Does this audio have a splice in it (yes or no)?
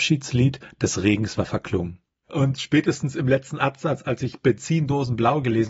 yes